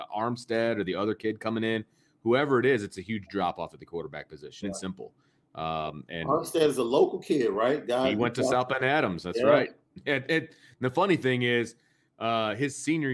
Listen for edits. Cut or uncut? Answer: cut